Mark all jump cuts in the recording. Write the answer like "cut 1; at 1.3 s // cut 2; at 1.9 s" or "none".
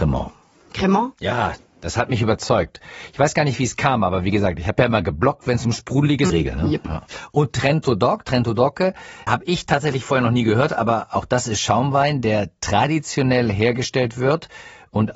cut 1; at 6.3 s // cut 2; at 9.3 s